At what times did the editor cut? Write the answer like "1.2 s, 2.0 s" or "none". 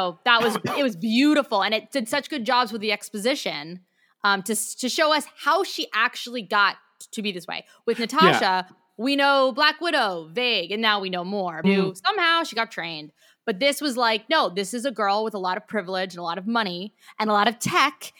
11.6 s